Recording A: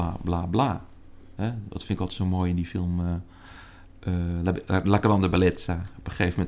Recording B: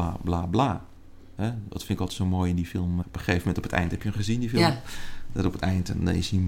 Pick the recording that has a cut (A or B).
B